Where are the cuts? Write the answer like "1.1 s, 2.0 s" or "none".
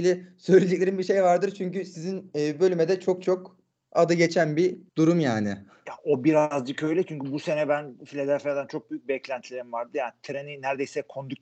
4.9 s